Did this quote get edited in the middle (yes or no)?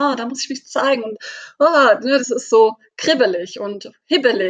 no